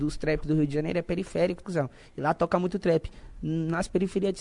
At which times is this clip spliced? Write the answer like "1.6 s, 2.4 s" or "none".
1.6 s